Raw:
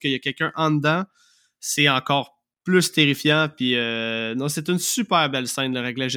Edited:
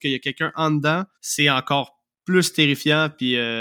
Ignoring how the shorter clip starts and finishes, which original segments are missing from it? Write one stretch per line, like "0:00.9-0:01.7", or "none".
0:01.1-0:01.5